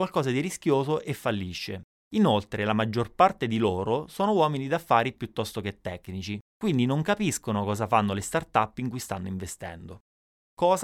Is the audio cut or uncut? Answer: uncut